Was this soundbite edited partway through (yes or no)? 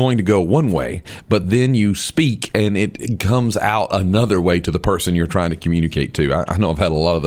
no